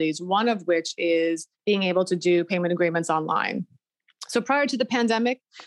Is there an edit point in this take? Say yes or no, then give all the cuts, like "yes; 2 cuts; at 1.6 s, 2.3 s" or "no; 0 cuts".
no; 0 cuts